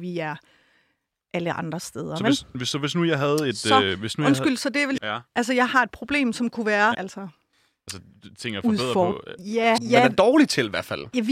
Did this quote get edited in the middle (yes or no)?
yes